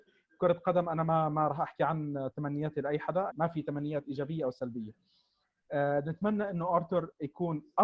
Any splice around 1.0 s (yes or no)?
no